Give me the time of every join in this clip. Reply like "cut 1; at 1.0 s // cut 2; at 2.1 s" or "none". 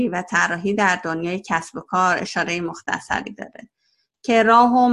none